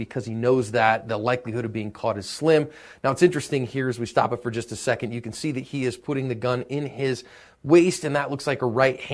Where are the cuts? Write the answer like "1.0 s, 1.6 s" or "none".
none